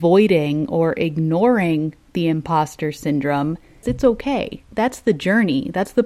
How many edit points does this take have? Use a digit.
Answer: 1